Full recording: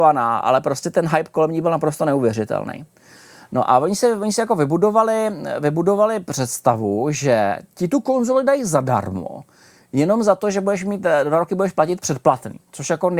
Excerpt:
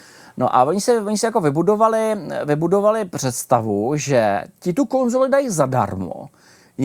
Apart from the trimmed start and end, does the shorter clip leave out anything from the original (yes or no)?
no